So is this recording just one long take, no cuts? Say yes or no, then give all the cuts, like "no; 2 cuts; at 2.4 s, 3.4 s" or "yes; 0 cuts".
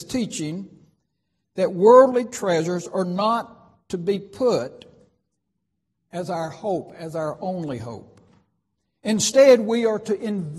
yes; 0 cuts